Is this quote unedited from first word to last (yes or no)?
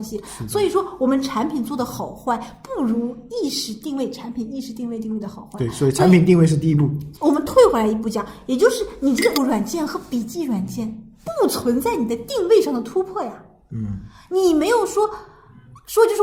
no